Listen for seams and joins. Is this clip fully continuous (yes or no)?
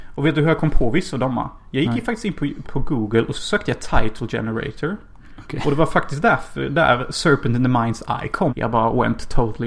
no